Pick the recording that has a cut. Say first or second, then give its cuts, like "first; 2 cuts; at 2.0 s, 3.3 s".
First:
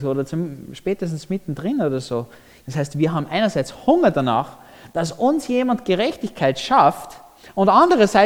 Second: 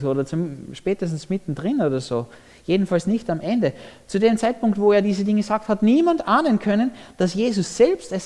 first; 1 cut; at 2.6 s